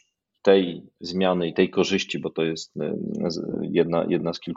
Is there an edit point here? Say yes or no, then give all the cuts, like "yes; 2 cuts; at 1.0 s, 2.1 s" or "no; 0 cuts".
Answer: no; 0 cuts